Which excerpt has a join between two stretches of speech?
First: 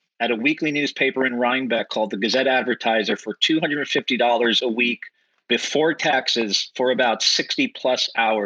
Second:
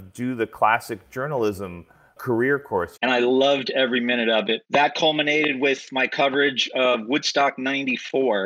second; 2 cuts; at 3.0 s, 4.6 s

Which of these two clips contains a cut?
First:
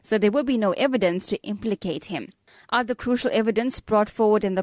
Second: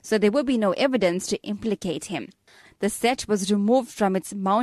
second; 1 cut; at 2.6 s

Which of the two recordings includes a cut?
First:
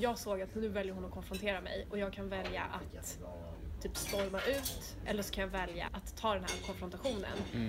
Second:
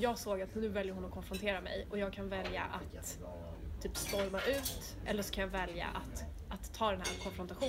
first; 1 cut; at 5.9 s

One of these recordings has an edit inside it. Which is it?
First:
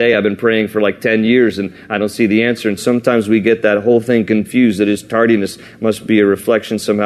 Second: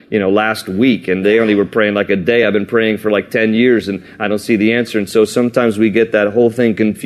first; 1 cut; at 2.8 s

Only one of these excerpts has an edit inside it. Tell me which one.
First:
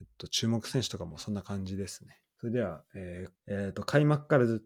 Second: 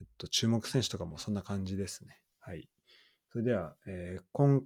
first; 2 cuts; at 2.2 s, 3.4 s

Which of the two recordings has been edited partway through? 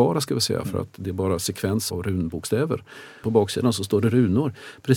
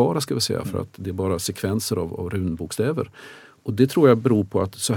first; 2 cuts; at 1.9 s, 3.2 s

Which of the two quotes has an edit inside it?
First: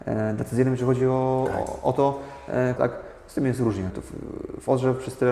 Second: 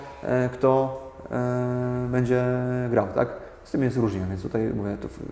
first; 2 cuts; at 2.8 s, 3.9 s

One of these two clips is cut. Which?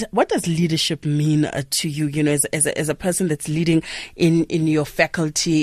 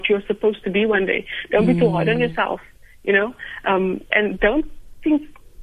second; 1 cut; at 4.1 s

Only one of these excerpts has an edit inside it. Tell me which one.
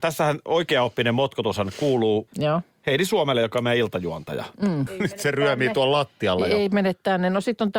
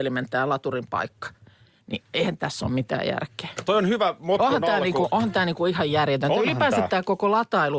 first; 2 cuts; at 2.3 s, 4.9 s

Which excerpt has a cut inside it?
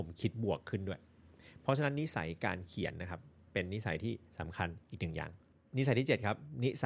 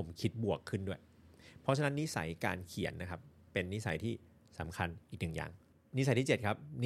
first; 1 cut; at 4.3 s

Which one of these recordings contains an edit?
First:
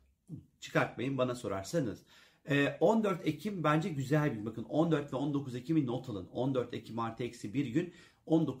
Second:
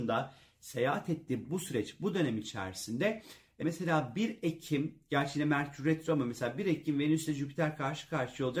second; 1 cut; at 3.6 s

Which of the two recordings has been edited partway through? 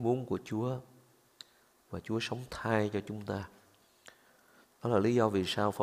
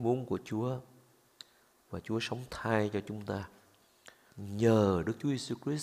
second; 1 cut; at 4.3 s

